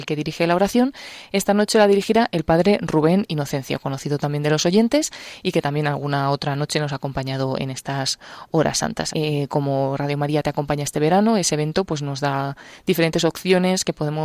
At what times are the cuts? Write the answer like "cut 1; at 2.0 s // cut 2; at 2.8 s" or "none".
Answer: cut 1; at 9.1 s